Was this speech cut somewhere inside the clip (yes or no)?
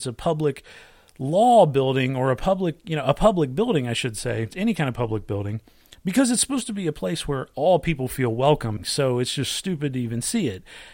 yes